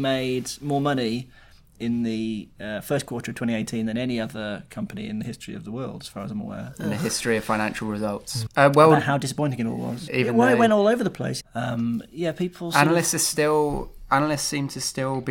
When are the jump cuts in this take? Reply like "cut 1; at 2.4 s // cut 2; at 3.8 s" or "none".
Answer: cut 1; at 8.5 s // cut 2; at 10.1 s // cut 3; at 11.4 s